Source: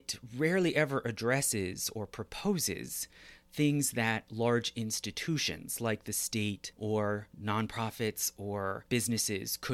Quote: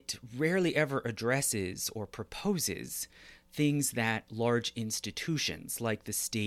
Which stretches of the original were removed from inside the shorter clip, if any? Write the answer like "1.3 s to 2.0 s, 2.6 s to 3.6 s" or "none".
none